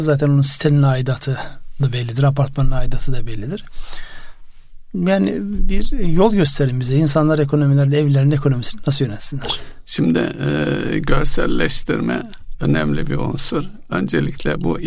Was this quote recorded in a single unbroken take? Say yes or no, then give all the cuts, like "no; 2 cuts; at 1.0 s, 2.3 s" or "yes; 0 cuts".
yes; 0 cuts